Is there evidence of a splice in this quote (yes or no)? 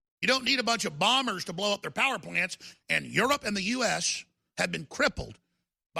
yes